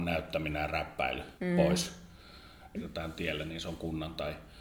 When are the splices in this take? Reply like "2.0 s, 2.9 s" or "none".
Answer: 1.4 s, 2.8 s

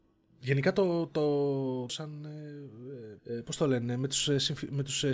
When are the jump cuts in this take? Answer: 1.9 s, 3.2 s

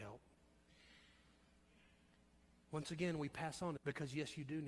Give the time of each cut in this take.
3.8 s

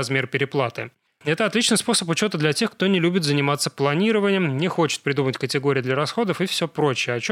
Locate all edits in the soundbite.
1.2 s

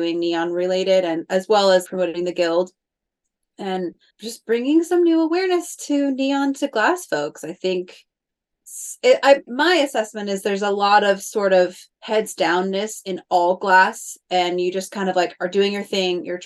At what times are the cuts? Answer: 1.8 s, 4.1 s, 9.5 s

